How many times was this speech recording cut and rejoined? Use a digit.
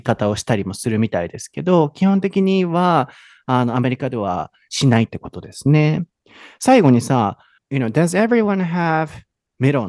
1